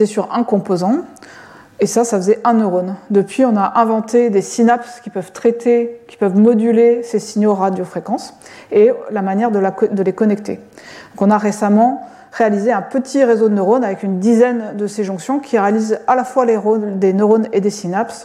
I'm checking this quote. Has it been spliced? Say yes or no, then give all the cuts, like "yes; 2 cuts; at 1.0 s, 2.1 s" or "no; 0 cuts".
no; 0 cuts